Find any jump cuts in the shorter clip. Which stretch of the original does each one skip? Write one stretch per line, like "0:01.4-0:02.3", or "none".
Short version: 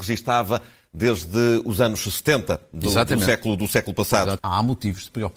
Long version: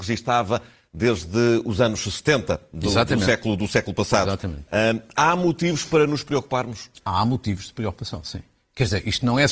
0:04.4-0:07.0